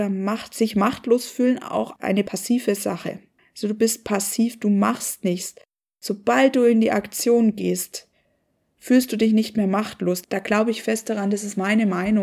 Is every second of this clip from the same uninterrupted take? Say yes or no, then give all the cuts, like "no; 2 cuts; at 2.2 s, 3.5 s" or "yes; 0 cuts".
yes; 0 cuts